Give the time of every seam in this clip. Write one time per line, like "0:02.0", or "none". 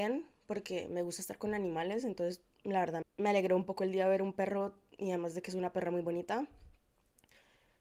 0:03.0

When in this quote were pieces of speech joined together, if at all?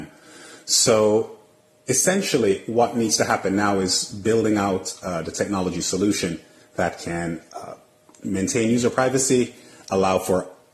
none

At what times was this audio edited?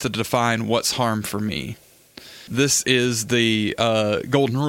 0:02.5

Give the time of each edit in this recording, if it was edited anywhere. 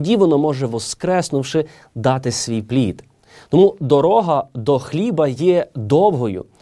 none

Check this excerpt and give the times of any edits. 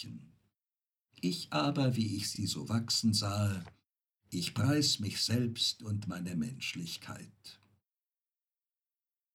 none

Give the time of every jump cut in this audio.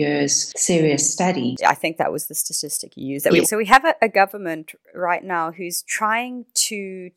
0:01.6
0:03.4

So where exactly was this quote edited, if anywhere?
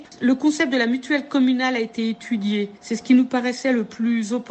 none

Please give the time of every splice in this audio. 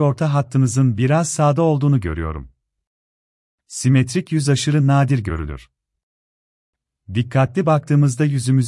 none

